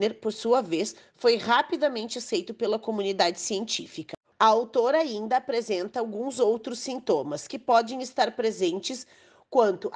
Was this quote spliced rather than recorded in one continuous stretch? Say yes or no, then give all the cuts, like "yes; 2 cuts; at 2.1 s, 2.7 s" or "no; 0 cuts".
yes; 1 cut; at 4.3 s